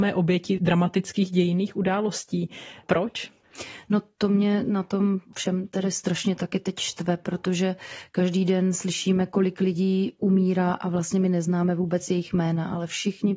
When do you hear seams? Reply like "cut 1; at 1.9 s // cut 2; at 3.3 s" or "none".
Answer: none